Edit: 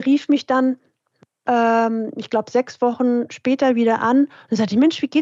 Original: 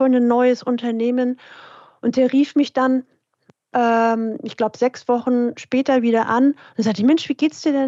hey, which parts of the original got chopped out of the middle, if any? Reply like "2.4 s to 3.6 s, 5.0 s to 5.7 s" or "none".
none